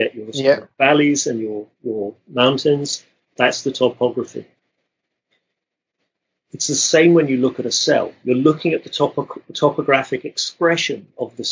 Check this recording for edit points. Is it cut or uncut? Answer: uncut